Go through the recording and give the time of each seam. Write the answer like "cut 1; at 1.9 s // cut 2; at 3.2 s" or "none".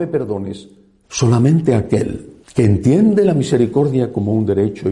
cut 1; at 1.0 s // cut 2; at 2.4 s